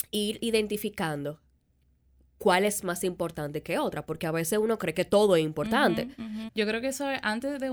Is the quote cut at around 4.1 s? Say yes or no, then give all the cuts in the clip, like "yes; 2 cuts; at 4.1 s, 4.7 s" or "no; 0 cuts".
no; 1 cut; at 6.5 s